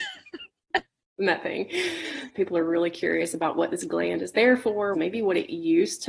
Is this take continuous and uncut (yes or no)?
no